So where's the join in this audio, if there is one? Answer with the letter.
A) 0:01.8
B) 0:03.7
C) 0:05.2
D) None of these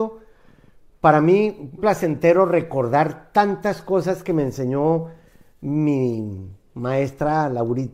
A